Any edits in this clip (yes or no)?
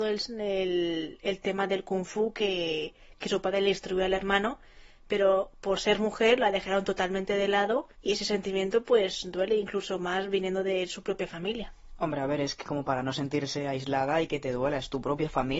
yes